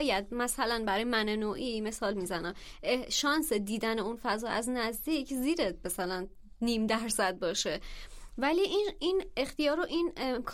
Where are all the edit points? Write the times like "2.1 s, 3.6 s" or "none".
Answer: none